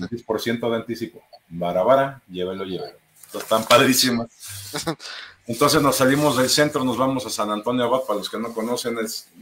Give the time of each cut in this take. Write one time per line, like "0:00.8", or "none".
none